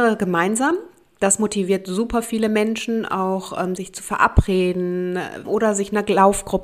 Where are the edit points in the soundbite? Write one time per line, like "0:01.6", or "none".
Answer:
0:03.8
0:05.4

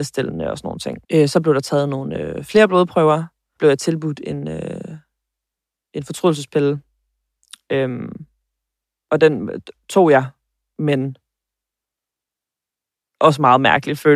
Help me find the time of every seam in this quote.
0:01.0
0:03.6

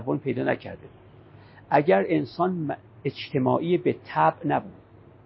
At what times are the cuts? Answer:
none

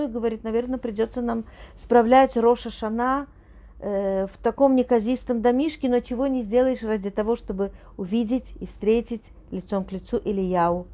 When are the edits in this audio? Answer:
none

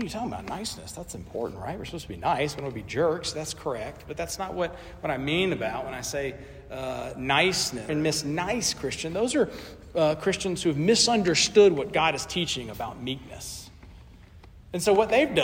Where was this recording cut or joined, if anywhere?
0:07.9

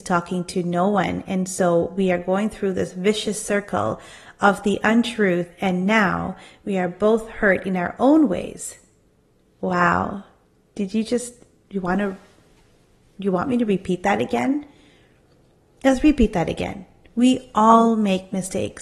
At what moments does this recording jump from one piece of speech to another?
none

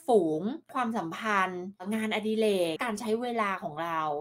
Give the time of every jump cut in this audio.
0:02.8

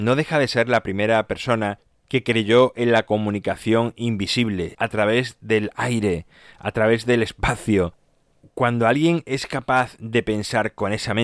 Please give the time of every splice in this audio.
0:04.7

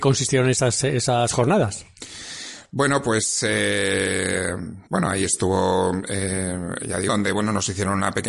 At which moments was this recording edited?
0:04.9
0:07.1

